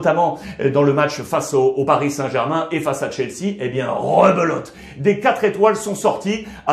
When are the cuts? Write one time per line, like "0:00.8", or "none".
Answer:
none